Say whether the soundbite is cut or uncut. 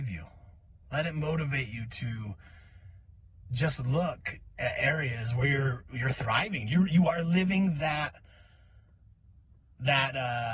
uncut